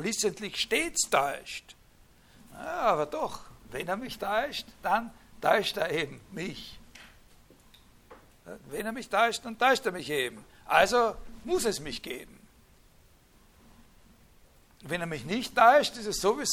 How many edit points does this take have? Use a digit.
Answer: 0